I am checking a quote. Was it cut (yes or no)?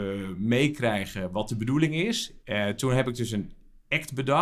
yes